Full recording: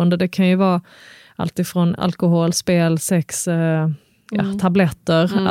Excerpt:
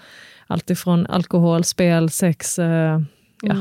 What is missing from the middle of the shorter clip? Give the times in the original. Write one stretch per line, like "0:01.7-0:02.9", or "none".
none